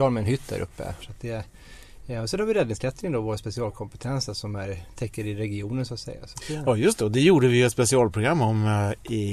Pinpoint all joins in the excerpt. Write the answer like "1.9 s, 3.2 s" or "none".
1.0 s